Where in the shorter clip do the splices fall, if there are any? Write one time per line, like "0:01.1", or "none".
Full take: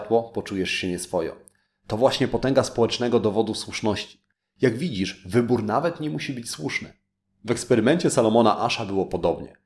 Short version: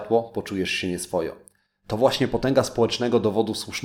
none